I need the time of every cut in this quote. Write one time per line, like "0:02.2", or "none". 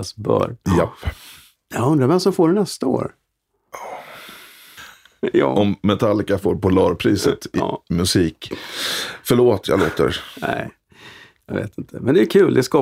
0:04.8